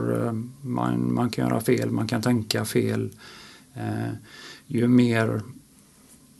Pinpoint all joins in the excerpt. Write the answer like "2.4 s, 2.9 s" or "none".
none